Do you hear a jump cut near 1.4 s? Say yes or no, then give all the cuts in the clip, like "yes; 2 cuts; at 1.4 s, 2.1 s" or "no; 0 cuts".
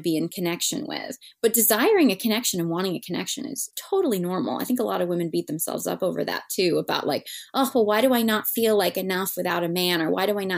no; 0 cuts